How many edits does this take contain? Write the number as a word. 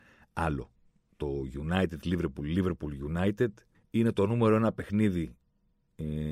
one